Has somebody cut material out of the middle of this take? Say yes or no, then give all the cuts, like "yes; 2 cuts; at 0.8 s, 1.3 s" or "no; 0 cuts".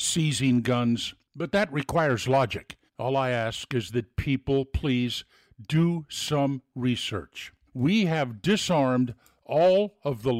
yes; 2 cuts; at 2.9 s, 7.7 s